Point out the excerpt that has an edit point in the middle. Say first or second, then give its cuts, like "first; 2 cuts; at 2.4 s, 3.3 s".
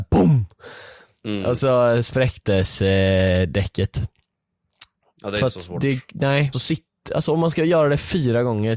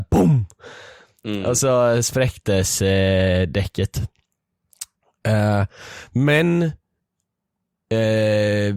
first; 2 cuts; at 5.1 s, 6.5 s